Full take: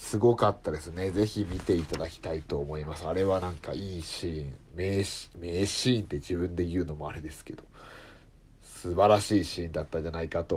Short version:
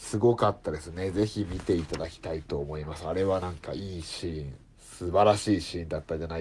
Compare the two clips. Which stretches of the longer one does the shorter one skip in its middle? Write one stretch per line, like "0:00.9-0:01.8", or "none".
0:04.6-0:08.5